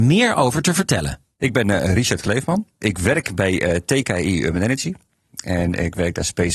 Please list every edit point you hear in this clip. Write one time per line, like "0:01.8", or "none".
none